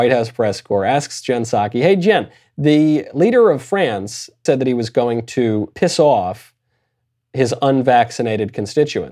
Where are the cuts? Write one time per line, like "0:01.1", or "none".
0:04.5
0:05.7